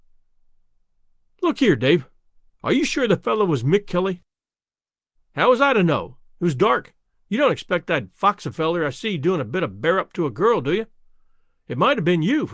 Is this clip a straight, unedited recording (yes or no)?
no